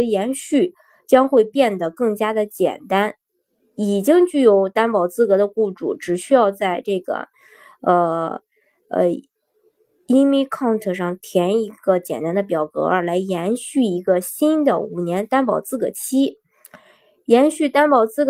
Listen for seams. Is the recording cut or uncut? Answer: uncut